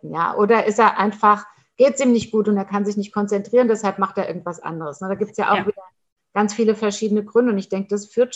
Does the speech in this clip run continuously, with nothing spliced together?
yes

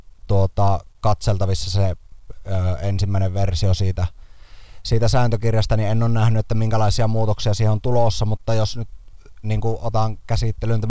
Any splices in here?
no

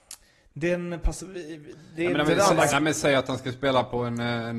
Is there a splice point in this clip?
yes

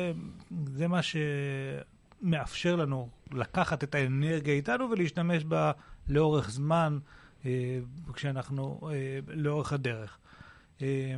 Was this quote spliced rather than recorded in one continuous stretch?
yes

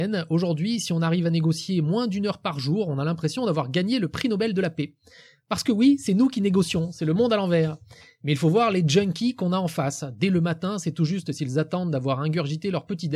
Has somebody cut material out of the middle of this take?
no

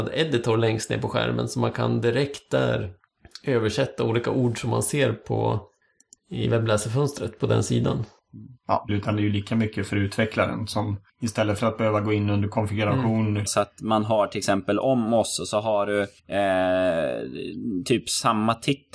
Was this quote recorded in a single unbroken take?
no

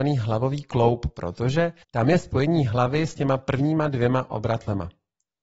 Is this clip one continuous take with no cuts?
no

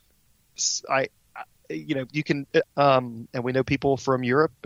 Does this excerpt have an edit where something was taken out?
yes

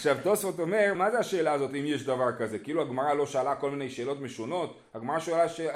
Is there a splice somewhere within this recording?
yes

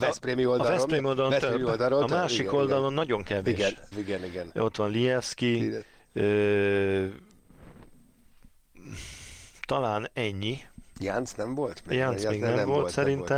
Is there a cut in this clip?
yes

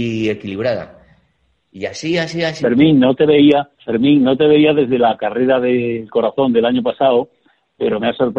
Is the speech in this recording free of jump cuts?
no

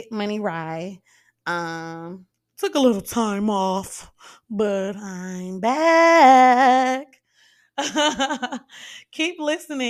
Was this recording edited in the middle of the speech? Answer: no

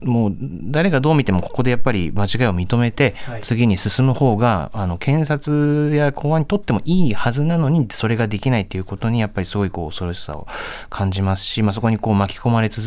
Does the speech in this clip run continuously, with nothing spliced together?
yes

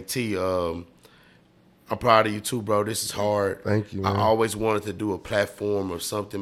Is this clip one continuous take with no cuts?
yes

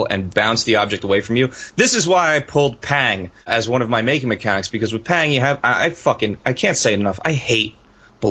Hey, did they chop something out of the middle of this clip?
no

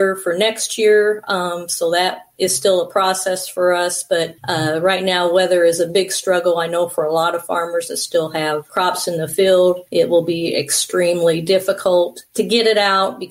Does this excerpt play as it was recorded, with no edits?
yes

